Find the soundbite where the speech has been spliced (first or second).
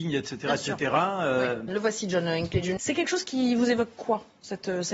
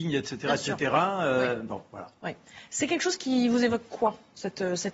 first